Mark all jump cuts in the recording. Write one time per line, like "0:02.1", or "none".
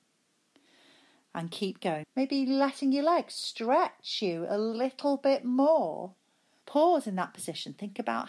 0:02.0
0:06.6